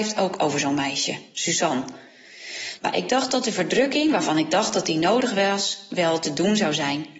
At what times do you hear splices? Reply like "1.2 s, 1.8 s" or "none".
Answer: 2.8 s